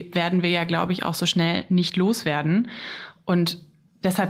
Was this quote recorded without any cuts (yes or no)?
yes